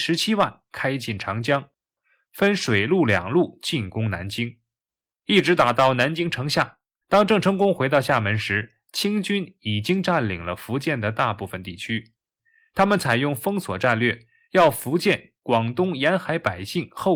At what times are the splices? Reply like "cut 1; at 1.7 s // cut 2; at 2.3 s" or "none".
cut 1; at 7.0 s

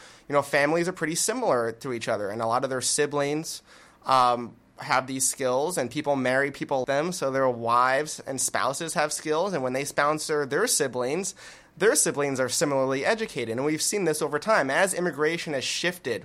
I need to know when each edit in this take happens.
cut 1; at 6.8 s

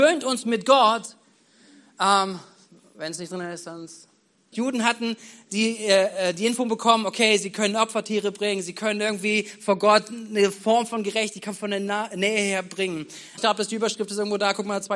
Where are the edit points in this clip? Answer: cut 1; at 4.5 s // cut 2; at 13.4 s

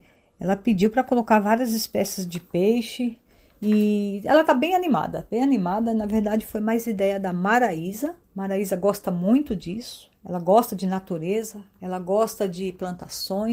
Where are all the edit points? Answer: cut 1; at 8.2 s

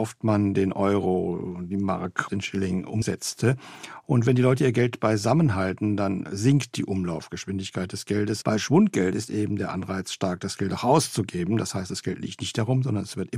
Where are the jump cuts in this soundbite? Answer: cut 1; at 8.4 s

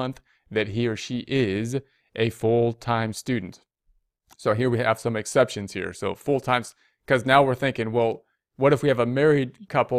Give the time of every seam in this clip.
none

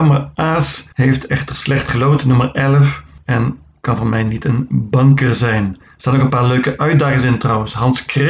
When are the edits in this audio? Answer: cut 1; at 0.9 s

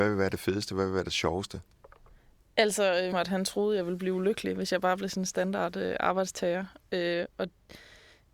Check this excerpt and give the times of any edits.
cut 1; at 3.1 s

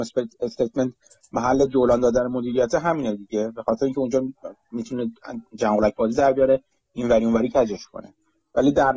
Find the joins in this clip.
none

